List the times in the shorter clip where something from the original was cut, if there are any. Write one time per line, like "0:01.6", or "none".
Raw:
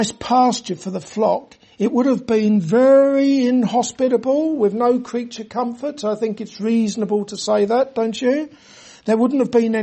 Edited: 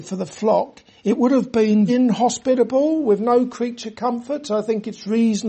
0:01.9